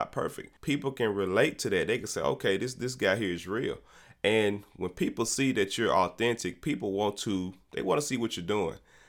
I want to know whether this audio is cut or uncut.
uncut